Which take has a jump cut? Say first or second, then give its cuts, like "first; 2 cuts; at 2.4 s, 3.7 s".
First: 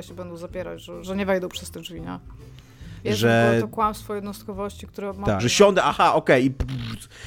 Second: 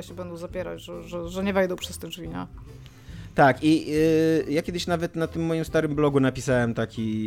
first; 3 cuts; at 1.0 s, 3.0 s, 5.4 s